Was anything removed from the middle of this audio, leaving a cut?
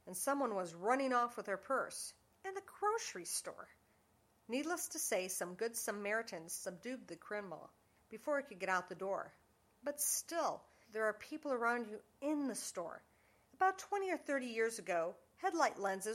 yes; 2 cuts; at 10.8 s, 13.5 s

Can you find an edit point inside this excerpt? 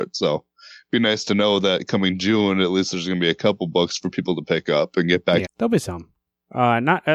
yes; 1 cut; at 5.4 s

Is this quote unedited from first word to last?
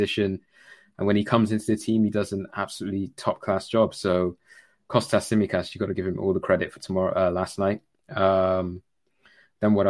yes; 0 cuts

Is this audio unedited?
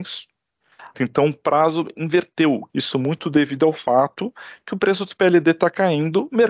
no; 2 cuts; at 0.9 s, 2.7 s

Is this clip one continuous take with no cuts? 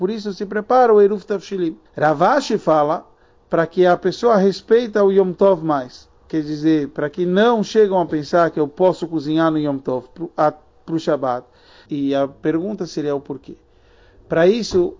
no; 2 cuts; at 1.9 s, 11.9 s

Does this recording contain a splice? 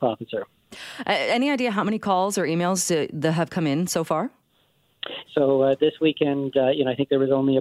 yes; 1 cut; at 5.2 s

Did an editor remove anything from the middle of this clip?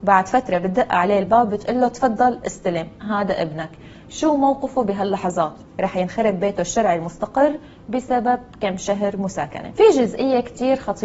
yes; 1 cut; at 5.6 s

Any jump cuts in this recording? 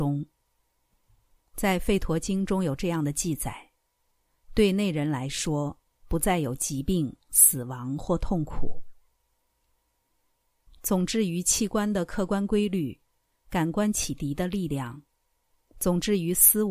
yes; 1 cut; at 10.7 s

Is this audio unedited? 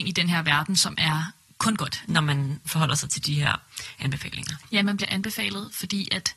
no; 2 cuts; at 2.1 s, 4.8 s

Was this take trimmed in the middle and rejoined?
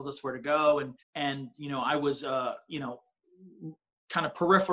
yes; 1 cut; at 1.0 s

